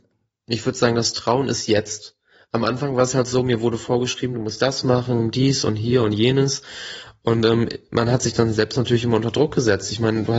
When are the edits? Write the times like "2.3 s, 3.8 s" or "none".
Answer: 4.3 s